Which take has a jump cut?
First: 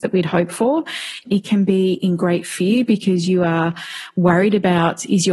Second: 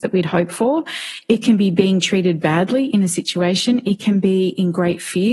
first; 1 cut; at 1.3 s

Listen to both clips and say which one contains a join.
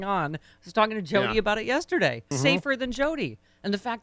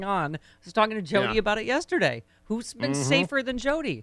first; 1 cut; at 2.3 s

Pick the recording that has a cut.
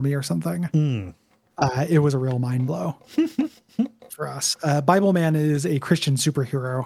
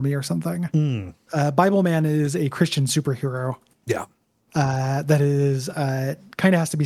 second; 1 cut; at 1.3 s

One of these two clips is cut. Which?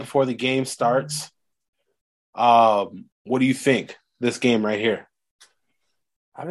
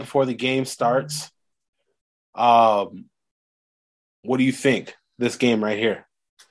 first; 1 cut; at 3.1 s

